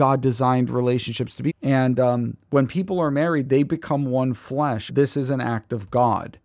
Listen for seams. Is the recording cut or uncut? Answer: cut